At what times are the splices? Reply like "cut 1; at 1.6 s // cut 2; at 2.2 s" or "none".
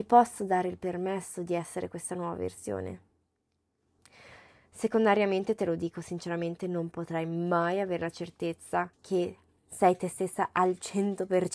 cut 1; at 8.9 s